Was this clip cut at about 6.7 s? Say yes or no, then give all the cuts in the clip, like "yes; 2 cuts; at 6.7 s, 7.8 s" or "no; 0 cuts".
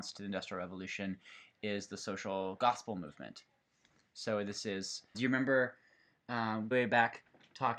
yes; 2 cuts; at 5.1 s, 6.7 s